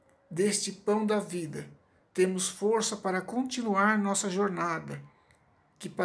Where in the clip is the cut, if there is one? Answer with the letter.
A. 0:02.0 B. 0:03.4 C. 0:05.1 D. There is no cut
D